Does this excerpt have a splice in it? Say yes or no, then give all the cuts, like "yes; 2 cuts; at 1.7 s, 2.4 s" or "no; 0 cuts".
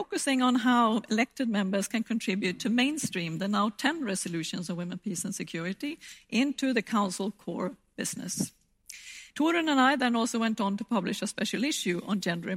yes; 1 cut; at 9.3 s